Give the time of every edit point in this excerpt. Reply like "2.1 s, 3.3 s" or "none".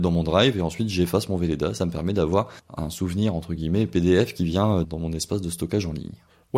2.6 s, 4.8 s